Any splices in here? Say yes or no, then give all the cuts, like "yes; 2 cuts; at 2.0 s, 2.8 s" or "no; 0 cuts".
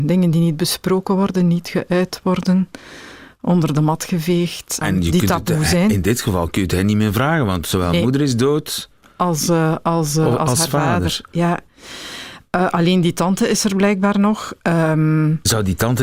yes; 1 cut; at 4.8 s